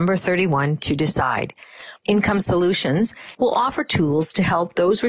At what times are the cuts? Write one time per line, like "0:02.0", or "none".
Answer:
0:02.0
0:03.3